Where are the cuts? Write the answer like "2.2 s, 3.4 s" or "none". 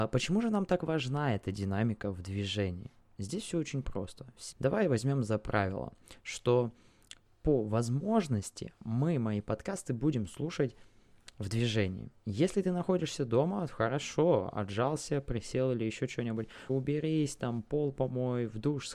4.5 s, 16.7 s